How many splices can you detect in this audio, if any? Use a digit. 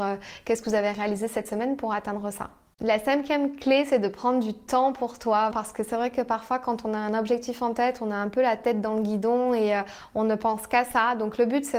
1